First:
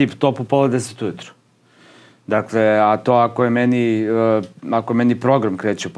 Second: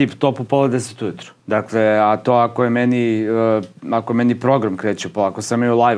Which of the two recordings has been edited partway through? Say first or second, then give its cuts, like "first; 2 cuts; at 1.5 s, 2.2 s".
second; 1 cut; at 1.4 s